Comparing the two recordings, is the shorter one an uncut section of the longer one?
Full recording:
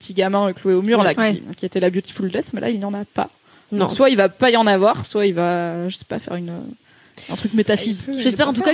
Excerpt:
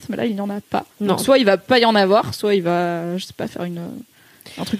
no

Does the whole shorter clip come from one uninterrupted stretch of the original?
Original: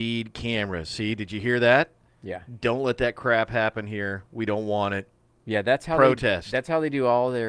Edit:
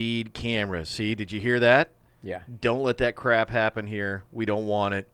yes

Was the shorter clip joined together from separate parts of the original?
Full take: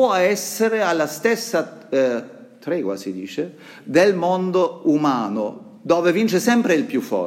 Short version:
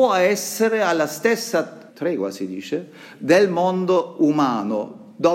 yes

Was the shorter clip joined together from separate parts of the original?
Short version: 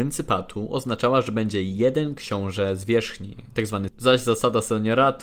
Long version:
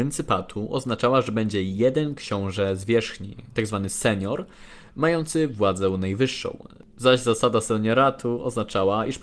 yes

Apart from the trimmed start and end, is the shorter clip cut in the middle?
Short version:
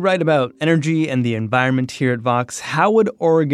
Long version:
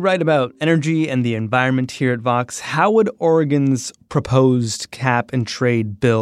no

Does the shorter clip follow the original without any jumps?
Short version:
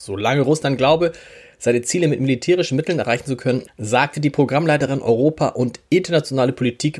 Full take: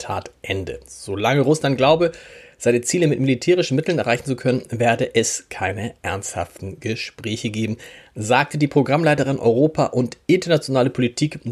no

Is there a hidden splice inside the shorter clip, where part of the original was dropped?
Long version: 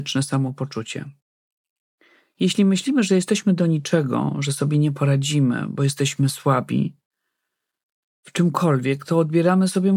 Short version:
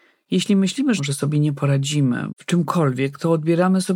yes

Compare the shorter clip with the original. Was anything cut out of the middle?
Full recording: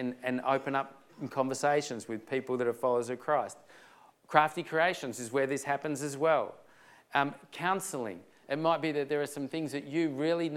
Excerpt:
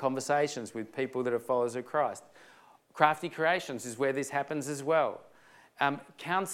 no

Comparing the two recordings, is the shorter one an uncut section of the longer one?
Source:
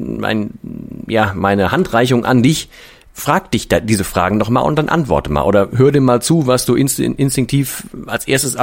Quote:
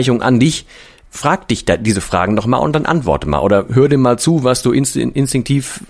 yes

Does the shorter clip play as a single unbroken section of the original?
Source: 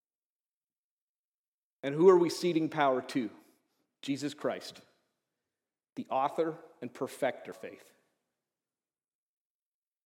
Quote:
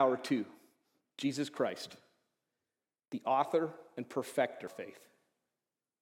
yes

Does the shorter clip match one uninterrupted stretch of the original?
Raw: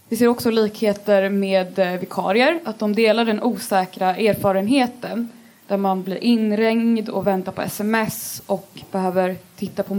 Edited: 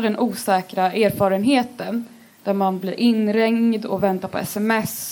yes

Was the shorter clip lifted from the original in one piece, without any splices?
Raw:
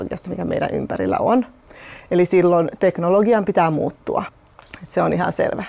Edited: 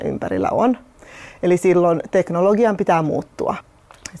yes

